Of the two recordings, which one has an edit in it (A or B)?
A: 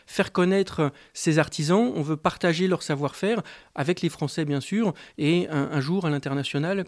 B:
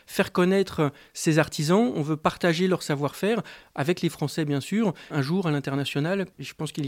B